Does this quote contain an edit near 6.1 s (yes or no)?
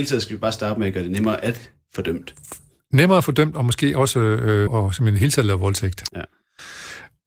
yes